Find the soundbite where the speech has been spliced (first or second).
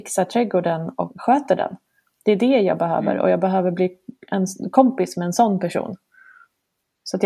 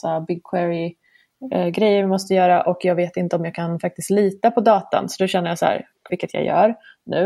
second